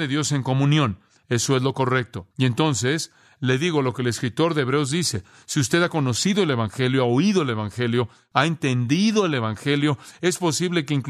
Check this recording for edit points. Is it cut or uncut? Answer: cut